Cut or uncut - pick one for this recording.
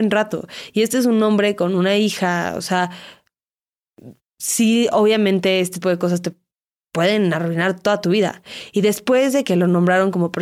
cut